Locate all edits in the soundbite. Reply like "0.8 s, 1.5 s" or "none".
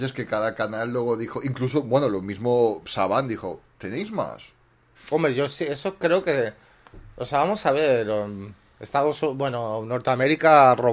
4.9 s